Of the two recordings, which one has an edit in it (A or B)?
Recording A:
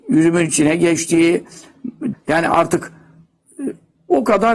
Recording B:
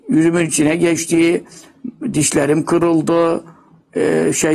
A